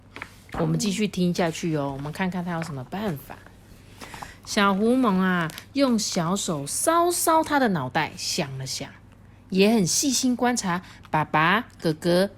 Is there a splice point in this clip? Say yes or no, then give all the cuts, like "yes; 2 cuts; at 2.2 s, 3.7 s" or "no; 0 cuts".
no; 0 cuts